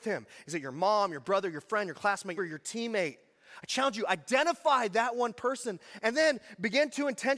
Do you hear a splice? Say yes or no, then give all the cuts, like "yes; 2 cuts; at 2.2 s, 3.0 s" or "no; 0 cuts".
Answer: yes; 1 cut; at 2.4 s